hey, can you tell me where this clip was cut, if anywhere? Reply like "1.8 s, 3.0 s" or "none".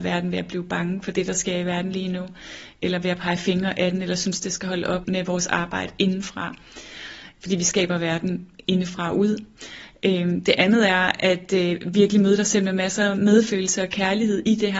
5.0 s